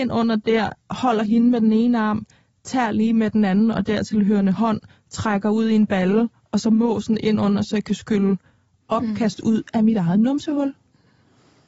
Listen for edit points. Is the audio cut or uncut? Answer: uncut